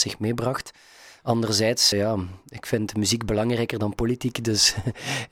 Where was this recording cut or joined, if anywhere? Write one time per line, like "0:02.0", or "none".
0:01.9

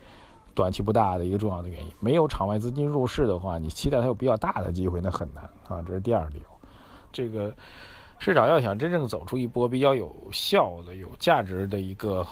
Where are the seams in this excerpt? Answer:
0:07.1

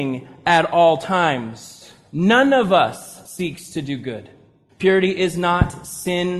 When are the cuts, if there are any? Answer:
0:04.7

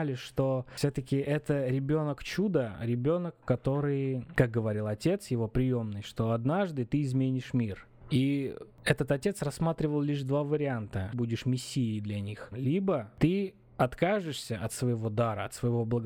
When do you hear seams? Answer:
0:11.1
0:12.5

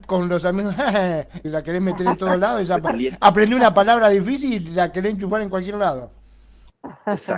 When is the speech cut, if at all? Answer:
0:01.4

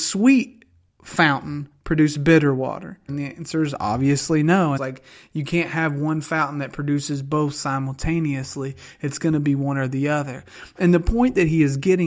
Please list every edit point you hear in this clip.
0:03.1
0:04.8

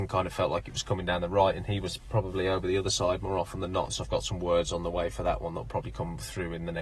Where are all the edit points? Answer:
0:03.9

